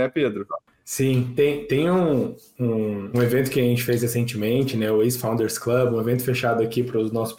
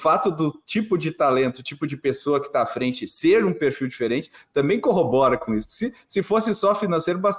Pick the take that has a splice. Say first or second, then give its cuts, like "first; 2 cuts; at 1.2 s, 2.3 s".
first; 1 cut; at 3.1 s